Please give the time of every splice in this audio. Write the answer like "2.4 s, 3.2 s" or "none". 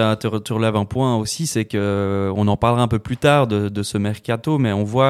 none